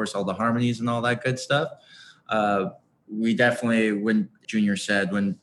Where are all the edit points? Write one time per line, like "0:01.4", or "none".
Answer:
0:03.1
0:04.4